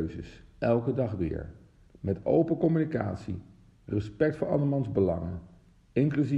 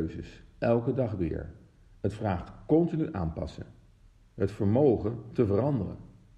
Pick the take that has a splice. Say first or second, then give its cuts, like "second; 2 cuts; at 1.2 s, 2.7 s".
first; 1 cut; at 1.9 s